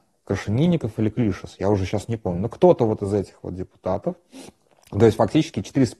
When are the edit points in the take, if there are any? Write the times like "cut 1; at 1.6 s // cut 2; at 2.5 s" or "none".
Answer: none